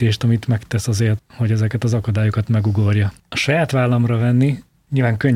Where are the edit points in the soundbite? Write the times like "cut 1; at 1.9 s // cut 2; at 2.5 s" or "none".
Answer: cut 1; at 1.2 s // cut 2; at 3.2 s